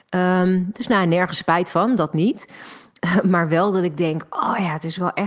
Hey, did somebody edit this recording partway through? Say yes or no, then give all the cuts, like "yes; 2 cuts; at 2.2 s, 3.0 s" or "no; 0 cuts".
no; 0 cuts